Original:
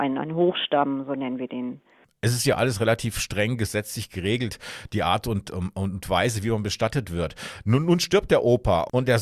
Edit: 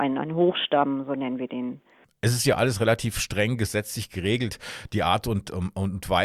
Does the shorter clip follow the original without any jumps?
yes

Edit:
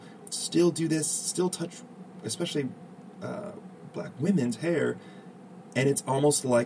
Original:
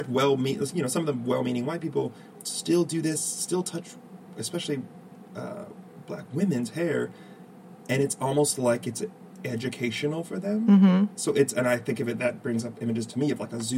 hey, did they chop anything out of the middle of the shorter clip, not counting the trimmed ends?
no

